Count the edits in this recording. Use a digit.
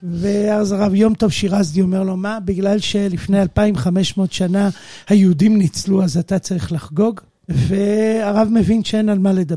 1